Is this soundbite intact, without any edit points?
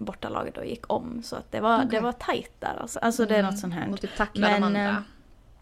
no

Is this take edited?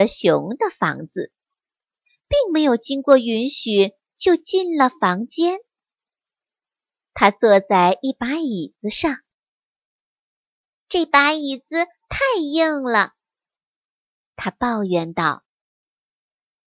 no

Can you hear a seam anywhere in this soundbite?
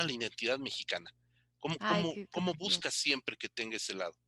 no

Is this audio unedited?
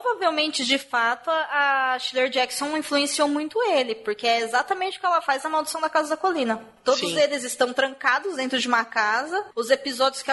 yes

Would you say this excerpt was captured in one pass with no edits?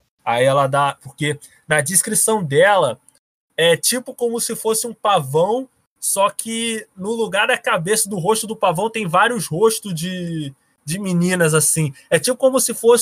no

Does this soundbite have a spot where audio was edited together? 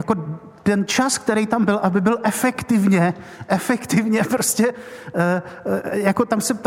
no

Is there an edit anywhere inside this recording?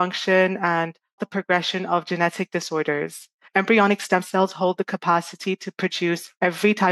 yes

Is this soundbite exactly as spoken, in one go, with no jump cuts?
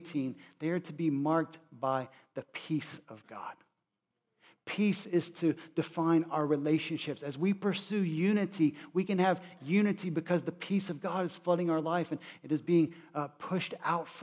yes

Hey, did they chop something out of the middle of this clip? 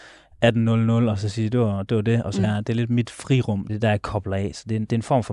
yes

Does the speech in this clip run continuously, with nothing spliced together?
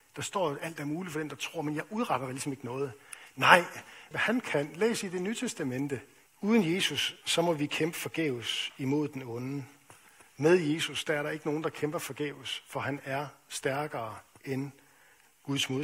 no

